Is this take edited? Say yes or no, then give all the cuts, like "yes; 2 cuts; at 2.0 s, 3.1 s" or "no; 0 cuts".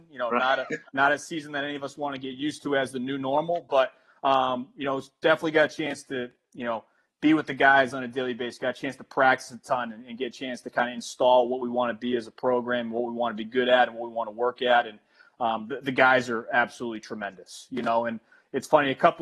no; 0 cuts